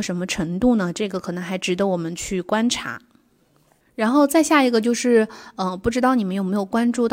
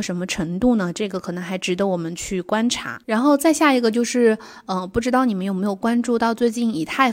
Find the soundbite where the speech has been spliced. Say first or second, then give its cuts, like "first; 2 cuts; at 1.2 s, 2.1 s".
second; 1 cut; at 3.0 s